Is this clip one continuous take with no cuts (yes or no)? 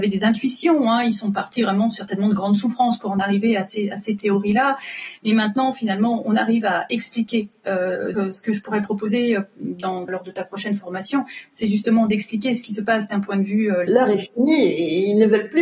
no